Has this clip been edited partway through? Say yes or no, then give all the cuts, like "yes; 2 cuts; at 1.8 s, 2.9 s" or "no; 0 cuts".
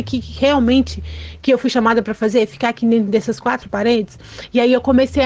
no; 0 cuts